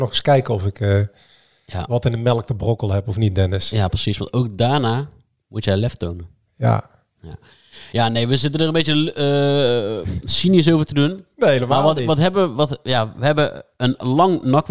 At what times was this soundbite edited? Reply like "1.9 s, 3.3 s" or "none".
none